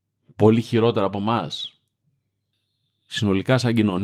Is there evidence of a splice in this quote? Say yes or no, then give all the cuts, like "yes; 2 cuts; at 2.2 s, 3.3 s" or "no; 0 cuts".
no; 0 cuts